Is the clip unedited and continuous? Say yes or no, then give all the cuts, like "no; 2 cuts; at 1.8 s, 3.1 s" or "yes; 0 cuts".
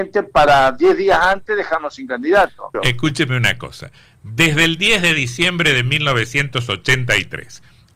no; 1 cut; at 2.7 s